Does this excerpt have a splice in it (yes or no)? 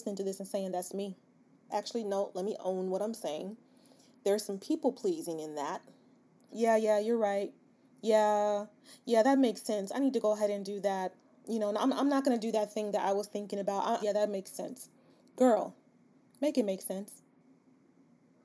yes